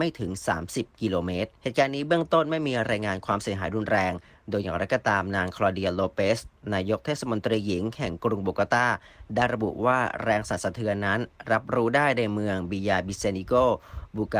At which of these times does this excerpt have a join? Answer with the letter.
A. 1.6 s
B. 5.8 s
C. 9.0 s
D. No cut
A